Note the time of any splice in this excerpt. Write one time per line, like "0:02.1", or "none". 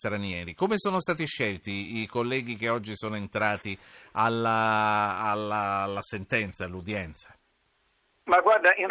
none

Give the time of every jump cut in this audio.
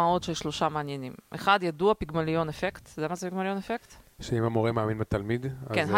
none

